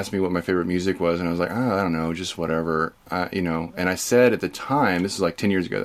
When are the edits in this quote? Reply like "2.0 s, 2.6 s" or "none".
none